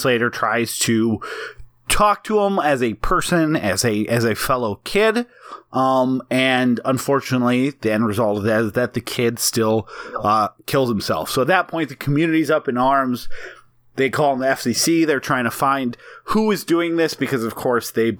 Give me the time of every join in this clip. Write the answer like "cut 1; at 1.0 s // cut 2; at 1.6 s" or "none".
none